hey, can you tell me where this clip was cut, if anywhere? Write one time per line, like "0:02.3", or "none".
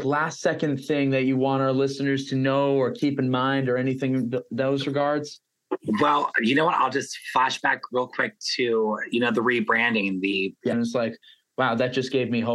0:10.7